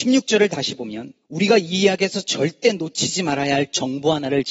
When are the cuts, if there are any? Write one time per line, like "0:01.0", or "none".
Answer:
0:01.2